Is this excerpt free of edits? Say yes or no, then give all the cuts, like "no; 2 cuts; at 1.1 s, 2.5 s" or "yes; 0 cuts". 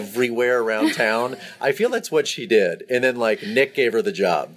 yes; 0 cuts